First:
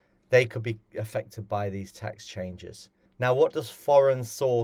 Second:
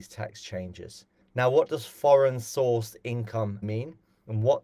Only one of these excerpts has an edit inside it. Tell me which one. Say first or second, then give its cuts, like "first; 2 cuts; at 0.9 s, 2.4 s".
second; 1 cut; at 3.6 s